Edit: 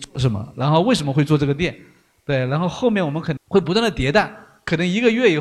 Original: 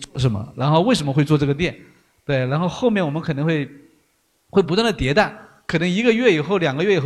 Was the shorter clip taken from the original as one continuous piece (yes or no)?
no